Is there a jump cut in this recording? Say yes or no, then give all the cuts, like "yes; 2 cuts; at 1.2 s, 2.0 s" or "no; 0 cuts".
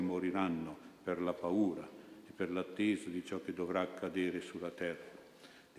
no; 0 cuts